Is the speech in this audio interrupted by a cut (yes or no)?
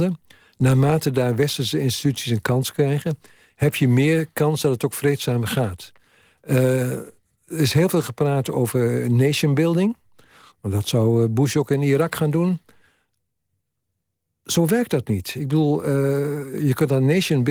no